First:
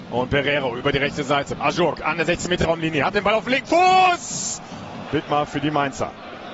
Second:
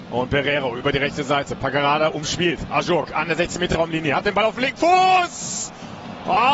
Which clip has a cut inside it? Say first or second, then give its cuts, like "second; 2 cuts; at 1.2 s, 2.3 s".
first; 2 cuts; at 1.6 s, 5.1 s